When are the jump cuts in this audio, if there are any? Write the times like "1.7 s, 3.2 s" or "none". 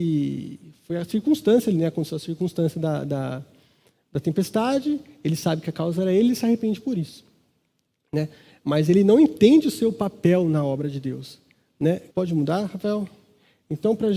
12.1 s